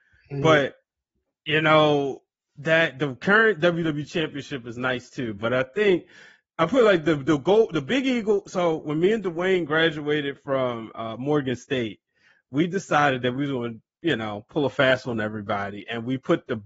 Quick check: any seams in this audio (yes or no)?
no